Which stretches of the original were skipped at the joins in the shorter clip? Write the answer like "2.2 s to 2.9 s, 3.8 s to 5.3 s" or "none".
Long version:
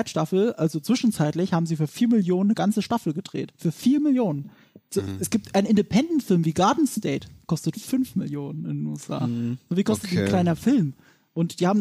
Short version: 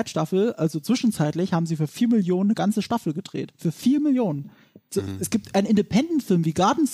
none